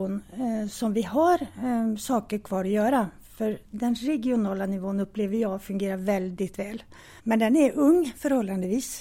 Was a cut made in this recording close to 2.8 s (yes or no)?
no